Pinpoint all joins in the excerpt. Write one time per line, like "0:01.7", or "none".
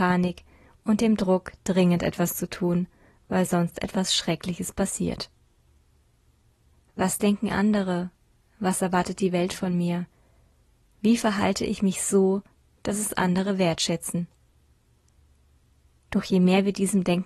none